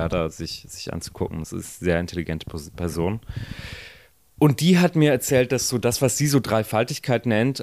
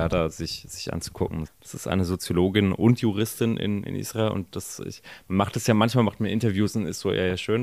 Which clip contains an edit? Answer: second; 1 cut; at 1.4 s

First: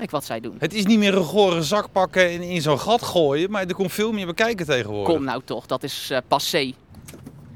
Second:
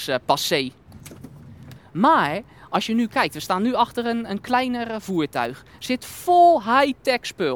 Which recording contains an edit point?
second; 1 cut; at 1.8 s

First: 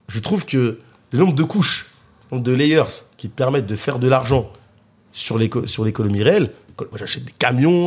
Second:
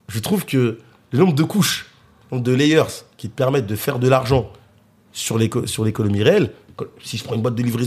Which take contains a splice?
first; 1 cut; at 6.9 s

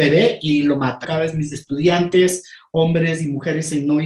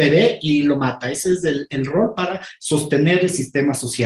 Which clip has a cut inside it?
first; 1 cut; at 1.0 s

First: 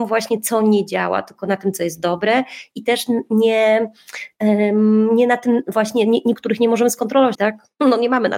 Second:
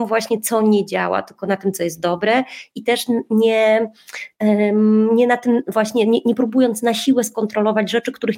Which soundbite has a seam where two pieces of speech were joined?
first; 2 cuts; at 6.3 s, 7.3 s

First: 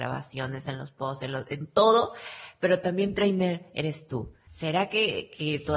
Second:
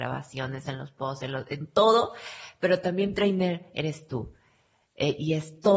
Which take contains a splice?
first; 1 cut; at 4.5 s

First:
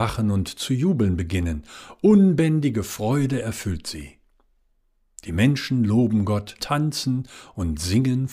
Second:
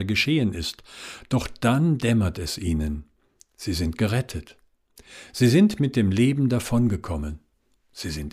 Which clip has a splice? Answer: first; 1 cut; at 6.6 s

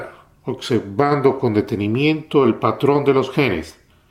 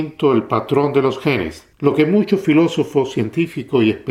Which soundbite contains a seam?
second; 1 cut; at 1.7 s

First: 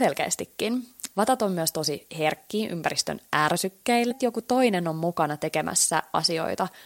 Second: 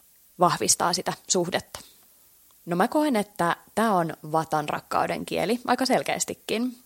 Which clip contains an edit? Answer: first; 2 cuts; at 1.1 s, 4.1 s

